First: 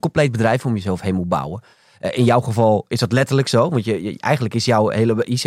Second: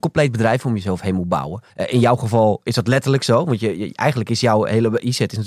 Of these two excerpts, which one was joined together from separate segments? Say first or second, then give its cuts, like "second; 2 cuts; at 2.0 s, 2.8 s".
second; 1 cut; at 1.7 s